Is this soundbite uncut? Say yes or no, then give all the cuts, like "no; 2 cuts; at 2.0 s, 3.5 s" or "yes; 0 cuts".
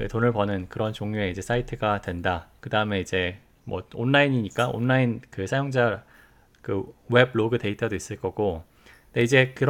no; 1 cut; at 2.6 s